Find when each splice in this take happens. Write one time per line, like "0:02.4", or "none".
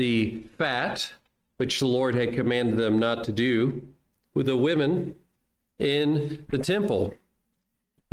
0:04.3